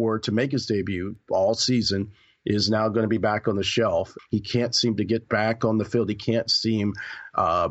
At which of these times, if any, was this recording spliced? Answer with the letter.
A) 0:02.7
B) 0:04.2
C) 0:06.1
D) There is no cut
B